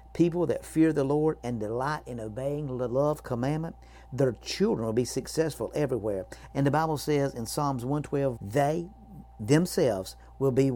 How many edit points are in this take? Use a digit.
2